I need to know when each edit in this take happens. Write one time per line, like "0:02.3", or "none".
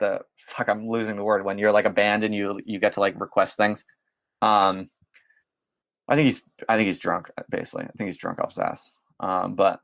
none